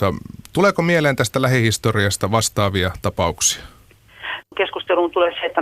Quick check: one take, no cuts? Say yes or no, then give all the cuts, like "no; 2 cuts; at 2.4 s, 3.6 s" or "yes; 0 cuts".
no; 1 cut; at 4.4 s